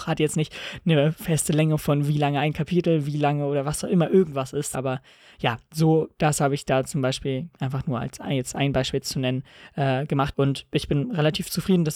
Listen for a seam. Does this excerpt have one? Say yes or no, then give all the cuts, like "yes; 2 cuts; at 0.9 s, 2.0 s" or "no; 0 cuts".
yes; 2 cuts; at 4.7 s, 10.3 s